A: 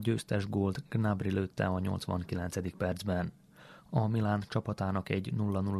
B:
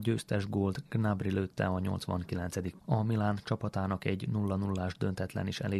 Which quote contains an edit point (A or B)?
B